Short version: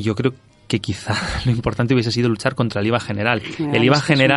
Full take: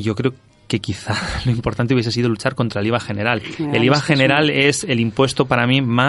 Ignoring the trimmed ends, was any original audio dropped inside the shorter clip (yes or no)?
no